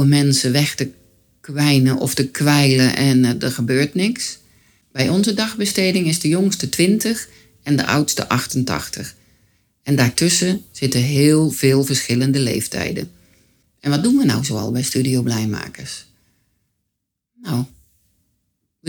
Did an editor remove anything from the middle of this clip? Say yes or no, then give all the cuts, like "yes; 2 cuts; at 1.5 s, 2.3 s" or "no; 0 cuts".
no; 0 cuts